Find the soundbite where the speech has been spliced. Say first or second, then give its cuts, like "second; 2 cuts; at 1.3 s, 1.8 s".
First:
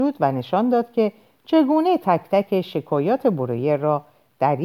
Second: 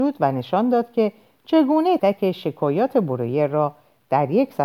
second; 1 cut; at 2.0 s